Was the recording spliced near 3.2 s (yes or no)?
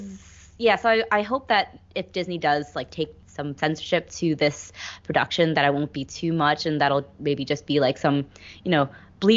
yes